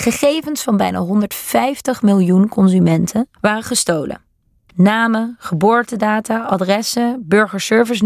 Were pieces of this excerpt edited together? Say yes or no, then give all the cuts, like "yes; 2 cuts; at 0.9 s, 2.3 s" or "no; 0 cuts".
yes; 1 cut; at 3.4 s